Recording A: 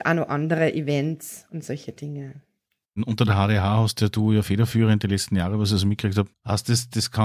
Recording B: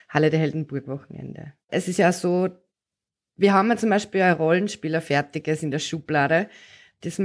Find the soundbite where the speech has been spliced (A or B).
A